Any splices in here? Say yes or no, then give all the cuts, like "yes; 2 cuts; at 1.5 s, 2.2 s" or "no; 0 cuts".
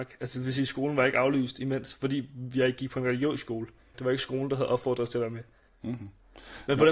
yes; 2 cuts; at 3.9 s, 5.7 s